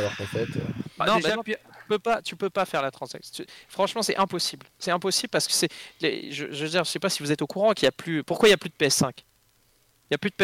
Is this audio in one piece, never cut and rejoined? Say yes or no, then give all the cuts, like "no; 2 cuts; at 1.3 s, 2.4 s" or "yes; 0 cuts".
yes; 0 cuts